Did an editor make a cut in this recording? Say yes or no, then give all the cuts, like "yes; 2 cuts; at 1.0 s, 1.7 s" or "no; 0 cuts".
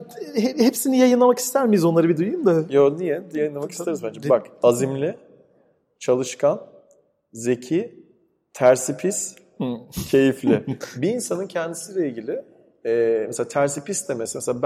no; 0 cuts